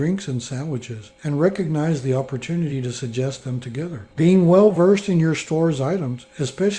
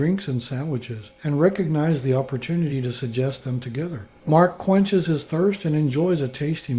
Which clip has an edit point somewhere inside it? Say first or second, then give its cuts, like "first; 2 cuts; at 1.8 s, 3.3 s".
first; 1 cut; at 4.1 s